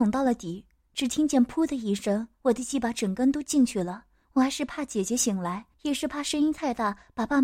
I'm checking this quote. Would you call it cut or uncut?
cut